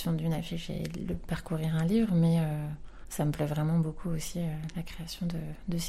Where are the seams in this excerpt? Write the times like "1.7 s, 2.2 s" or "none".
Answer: none